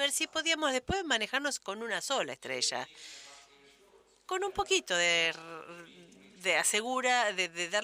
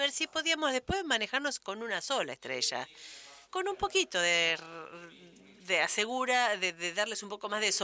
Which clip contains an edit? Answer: second; 1 cut; at 3.4 s

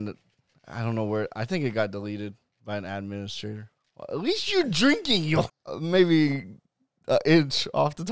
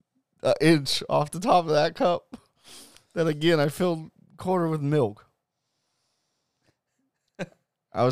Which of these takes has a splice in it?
first; 2 cuts; at 3.8 s, 5.5 s

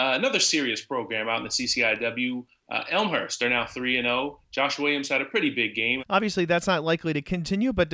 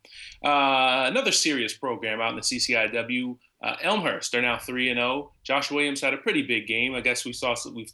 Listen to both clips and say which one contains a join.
first; 1 cut; at 6.0 s

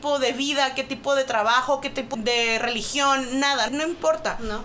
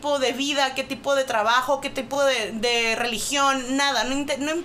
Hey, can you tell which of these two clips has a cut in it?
first; 2 cuts; at 2.1 s, 3.7 s

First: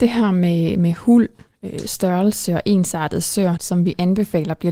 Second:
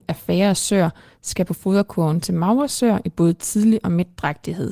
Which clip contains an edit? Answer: first; 1 cut; at 3.6 s

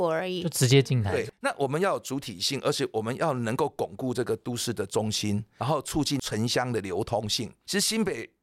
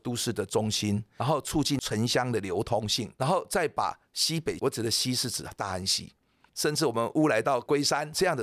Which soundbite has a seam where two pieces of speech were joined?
second; 3 cuts; at 3.2 s, 4.6 s, 6.5 s

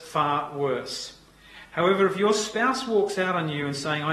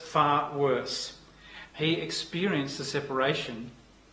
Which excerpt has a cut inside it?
second; 1 cut; at 1.7 s

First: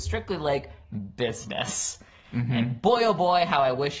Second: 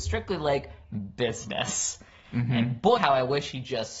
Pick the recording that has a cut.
second; 1 cut; at 3.0 s

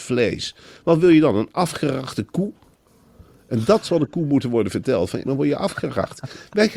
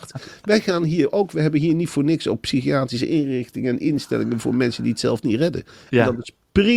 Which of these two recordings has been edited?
first; 1 cut; at 5.2 s

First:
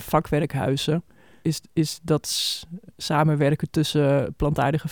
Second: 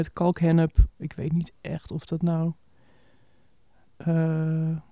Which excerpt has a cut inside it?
second; 1 cut; at 1.0 s

